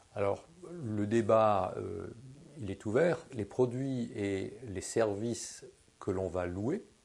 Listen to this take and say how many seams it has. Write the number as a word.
one